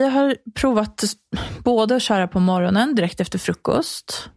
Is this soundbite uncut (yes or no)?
yes